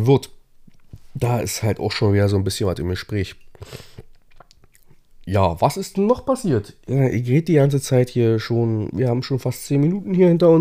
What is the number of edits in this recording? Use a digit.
0